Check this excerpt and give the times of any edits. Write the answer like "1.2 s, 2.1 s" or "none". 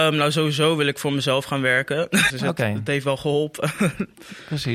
2.3 s